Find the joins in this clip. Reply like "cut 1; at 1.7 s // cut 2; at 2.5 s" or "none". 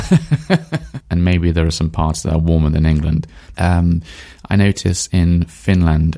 cut 1; at 1.0 s // cut 2; at 3.5 s

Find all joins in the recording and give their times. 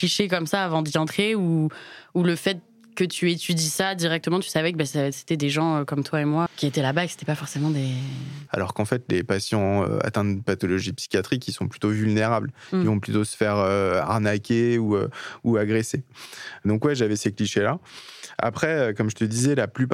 cut 1; at 6.5 s // cut 2; at 8.5 s

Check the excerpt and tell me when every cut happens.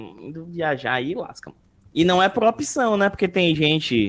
cut 1; at 1.9 s

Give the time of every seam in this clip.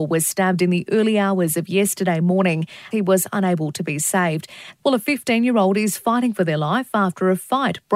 cut 1; at 2.9 s // cut 2; at 4.8 s

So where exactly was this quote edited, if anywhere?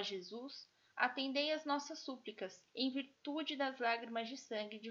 cut 1; at 2.7 s

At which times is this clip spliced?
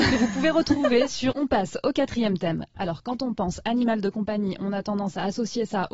cut 1; at 1.3 s // cut 2; at 2.7 s

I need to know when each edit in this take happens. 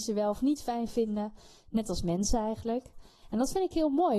cut 1; at 3.2 s

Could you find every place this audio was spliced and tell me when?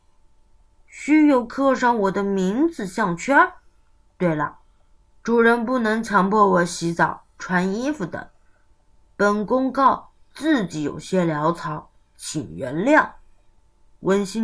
none

